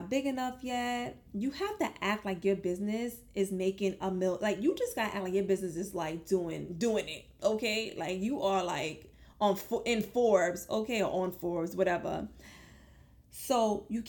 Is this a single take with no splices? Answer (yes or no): yes